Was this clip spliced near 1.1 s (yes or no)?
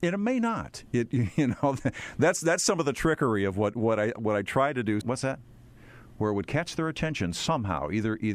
no